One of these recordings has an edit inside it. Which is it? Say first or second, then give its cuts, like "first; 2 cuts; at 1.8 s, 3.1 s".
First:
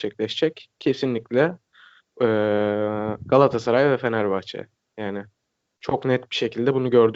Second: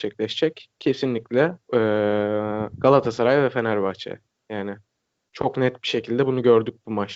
second; 1 cut; at 1.6 s